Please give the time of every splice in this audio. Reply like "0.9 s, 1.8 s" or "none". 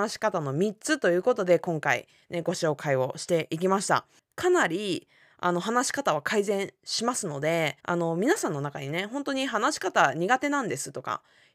4.2 s, 7.8 s